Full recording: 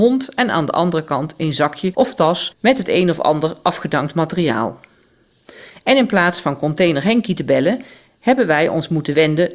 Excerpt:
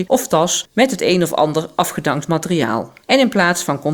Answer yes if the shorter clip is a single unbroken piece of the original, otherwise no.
no